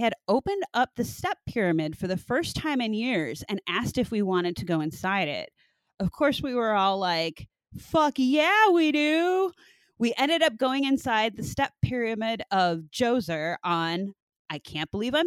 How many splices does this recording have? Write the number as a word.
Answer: zero